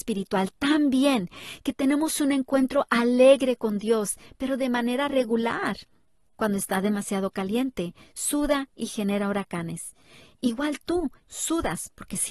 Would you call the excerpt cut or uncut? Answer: cut